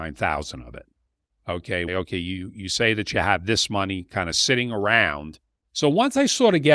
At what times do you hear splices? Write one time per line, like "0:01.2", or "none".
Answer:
0:01.9
0:05.6